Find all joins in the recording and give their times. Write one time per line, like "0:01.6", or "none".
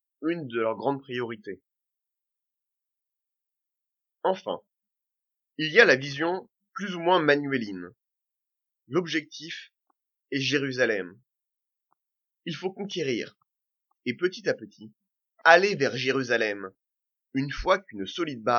0:13.9